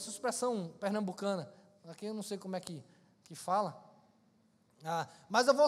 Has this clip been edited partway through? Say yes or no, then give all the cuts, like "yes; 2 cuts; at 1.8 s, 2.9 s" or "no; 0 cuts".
no; 0 cuts